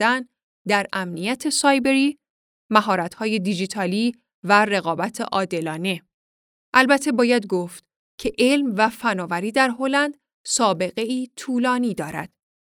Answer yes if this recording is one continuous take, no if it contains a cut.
no